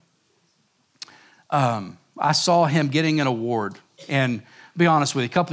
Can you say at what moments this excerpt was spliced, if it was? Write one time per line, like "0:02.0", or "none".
none